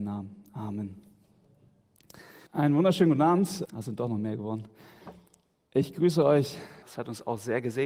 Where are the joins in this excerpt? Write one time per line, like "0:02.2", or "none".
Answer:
0:02.5
0:03.7
0:06.8